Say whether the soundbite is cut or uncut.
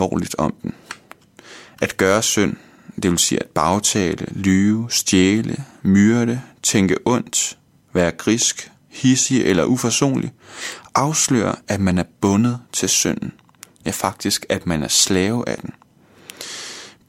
uncut